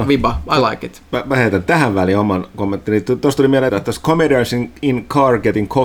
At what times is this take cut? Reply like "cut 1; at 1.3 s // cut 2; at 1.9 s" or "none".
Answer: cut 1; at 3.7 s